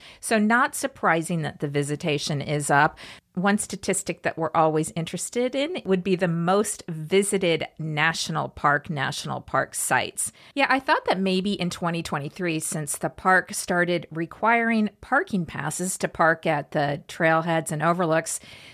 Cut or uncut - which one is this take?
cut